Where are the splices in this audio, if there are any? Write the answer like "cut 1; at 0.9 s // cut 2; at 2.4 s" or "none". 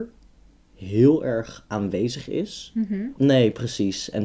cut 1; at 3.2 s